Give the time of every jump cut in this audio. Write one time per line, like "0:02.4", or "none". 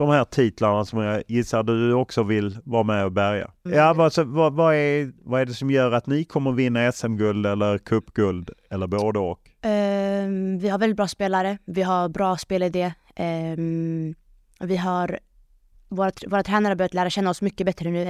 0:03.7
0:05.2